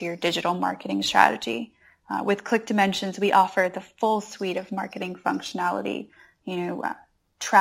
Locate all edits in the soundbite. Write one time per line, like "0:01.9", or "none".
none